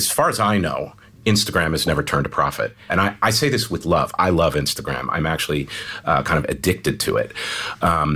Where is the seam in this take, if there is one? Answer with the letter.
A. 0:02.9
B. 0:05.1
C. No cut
A